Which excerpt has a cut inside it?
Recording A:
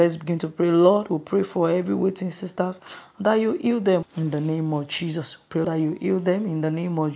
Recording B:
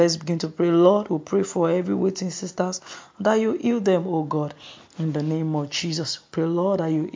A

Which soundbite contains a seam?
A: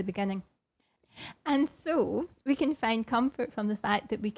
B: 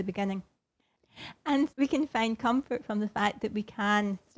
B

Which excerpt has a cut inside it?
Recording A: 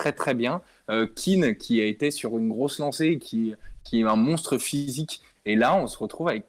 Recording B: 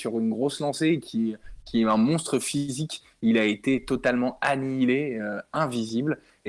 A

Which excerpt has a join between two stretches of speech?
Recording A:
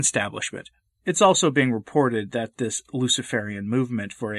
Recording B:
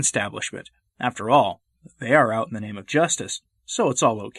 A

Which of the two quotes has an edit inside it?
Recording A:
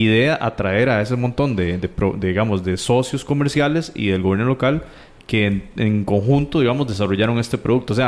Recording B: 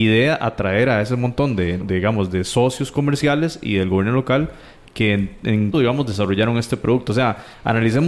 B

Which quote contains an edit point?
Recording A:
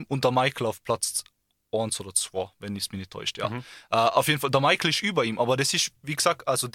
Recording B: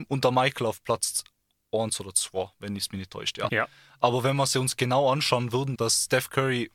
B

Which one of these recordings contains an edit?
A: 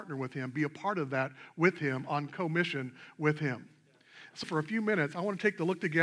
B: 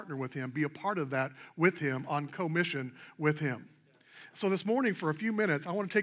A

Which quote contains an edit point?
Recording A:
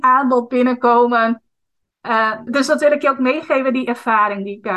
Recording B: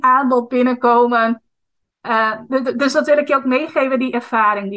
A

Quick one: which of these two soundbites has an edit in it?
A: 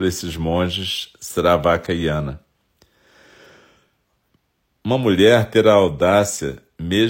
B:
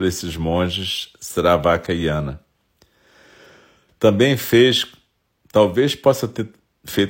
B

